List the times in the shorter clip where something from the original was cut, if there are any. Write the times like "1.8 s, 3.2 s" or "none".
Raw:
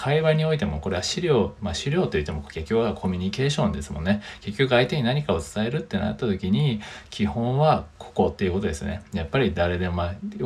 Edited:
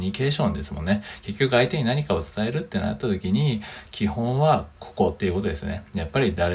none